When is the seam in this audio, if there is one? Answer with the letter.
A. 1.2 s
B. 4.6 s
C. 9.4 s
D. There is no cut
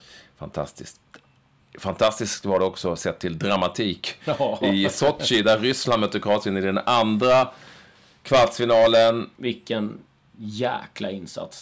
C